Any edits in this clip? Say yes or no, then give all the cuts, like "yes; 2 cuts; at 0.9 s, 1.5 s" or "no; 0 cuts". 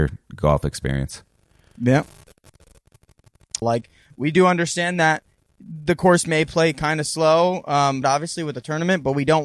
yes; 2 cuts; at 3.6 s, 8.0 s